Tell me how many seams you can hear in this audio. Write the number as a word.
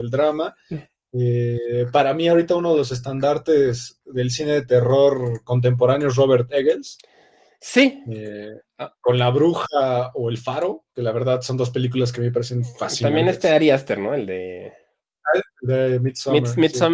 zero